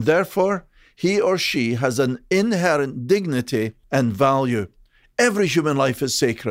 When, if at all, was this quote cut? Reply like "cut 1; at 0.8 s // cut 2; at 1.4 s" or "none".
cut 1; at 3.8 s